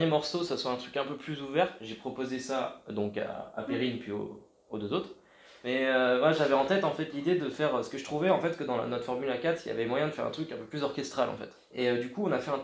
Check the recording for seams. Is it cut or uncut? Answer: uncut